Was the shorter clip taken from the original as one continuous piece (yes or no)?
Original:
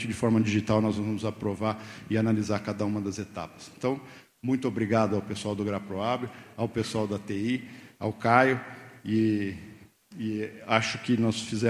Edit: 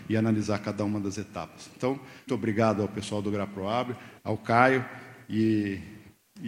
no